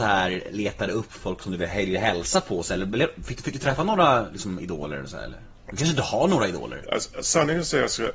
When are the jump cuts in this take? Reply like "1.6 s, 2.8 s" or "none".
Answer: 6.8 s